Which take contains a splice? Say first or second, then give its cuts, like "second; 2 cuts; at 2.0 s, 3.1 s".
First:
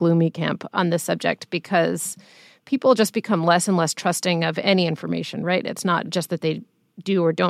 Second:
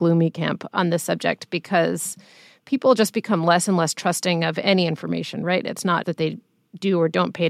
second; 1 cut; at 6.0 s